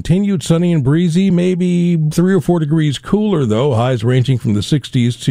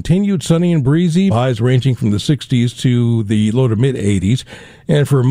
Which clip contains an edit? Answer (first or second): second